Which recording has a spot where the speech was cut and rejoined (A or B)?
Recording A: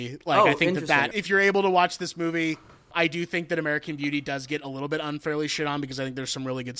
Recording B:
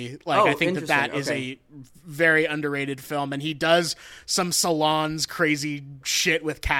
A